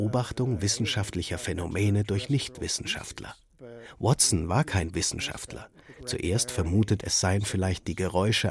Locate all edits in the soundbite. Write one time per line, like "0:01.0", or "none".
0:05.9
0:07.0

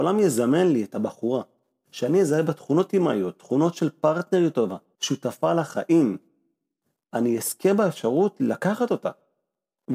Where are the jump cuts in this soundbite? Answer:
0:05.0

